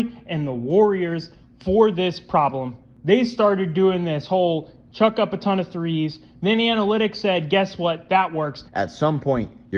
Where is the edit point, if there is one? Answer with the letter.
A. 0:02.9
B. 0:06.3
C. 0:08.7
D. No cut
C